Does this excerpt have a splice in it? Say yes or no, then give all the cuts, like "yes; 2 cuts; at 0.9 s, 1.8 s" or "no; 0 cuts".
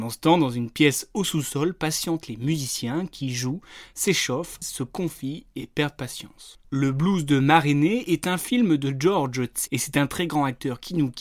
yes; 3 cuts; at 4.6 s, 6.6 s, 9.7 s